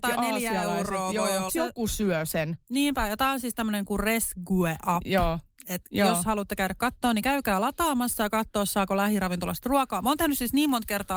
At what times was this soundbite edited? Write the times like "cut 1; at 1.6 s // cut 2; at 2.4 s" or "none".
cut 1; at 1.5 s